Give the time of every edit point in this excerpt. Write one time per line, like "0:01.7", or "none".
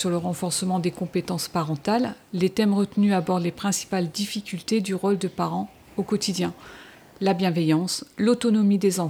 none